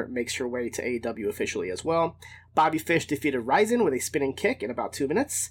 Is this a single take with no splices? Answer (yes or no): yes